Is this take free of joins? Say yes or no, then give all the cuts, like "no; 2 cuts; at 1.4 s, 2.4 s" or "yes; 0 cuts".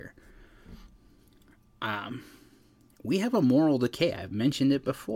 yes; 0 cuts